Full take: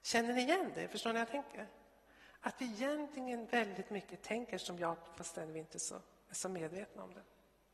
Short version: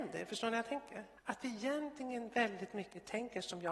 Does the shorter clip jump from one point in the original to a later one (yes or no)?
yes